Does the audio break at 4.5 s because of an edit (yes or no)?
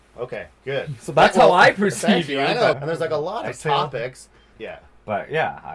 yes